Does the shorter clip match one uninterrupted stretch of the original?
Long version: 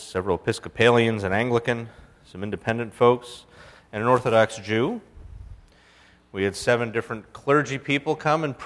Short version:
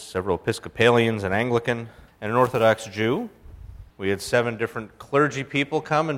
no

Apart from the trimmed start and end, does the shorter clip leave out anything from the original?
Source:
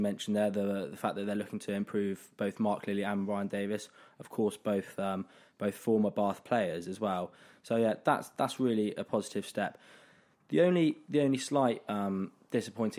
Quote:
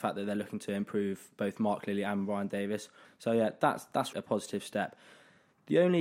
yes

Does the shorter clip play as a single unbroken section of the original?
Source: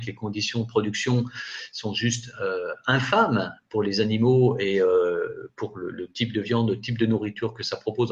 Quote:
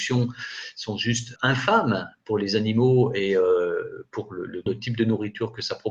no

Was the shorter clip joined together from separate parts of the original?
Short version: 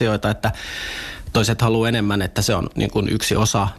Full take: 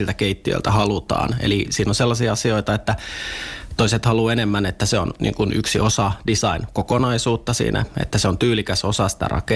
no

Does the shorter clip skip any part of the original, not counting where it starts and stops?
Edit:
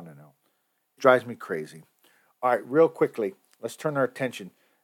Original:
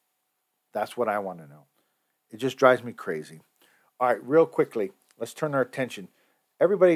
yes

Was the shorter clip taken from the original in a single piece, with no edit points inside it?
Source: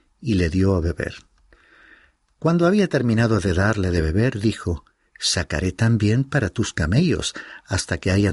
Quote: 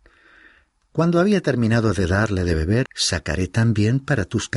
no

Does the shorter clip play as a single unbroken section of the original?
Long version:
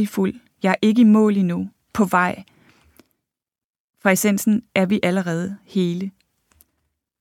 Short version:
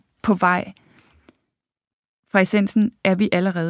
yes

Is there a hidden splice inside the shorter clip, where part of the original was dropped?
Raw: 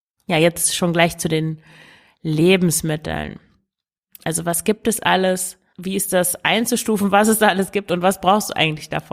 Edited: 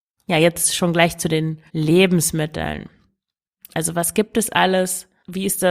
yes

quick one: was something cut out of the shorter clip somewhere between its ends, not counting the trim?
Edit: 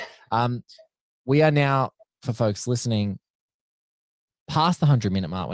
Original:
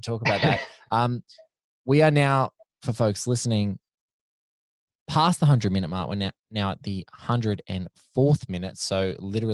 no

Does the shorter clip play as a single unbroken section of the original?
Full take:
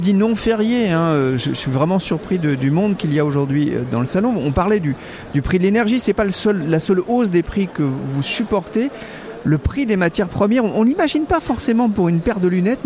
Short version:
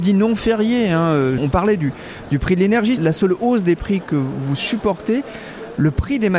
no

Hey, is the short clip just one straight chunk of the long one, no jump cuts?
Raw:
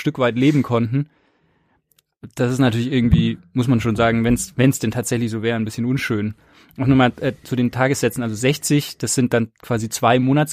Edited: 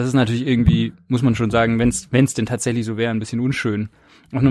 yes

